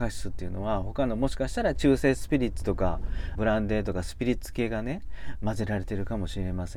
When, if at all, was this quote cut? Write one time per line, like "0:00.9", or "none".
0:03.4

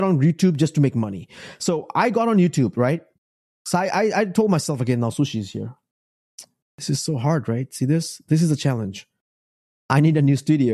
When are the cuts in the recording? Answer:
none

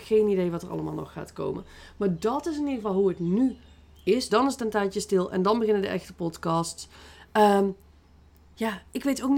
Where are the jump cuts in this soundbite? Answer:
0:04.3

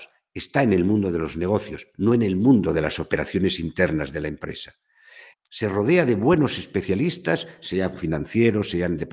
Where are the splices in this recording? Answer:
0:05.3

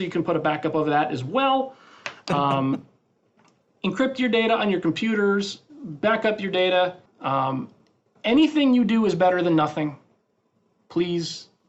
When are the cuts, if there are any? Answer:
0:07.1

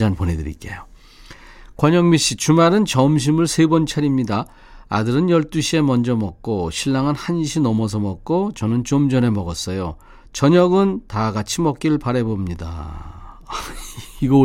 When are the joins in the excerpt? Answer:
none

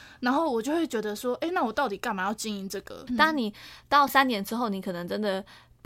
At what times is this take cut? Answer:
0:03.1
0:04.1

